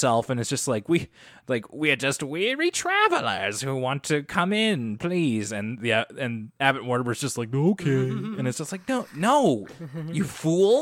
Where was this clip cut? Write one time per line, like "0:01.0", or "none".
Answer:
none